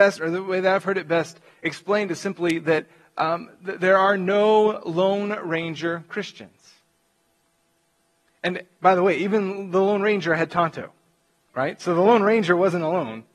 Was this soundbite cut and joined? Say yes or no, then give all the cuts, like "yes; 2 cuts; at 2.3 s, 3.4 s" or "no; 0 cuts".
no; 0 cuts